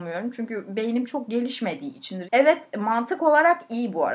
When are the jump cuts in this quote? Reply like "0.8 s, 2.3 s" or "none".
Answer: 2.2 s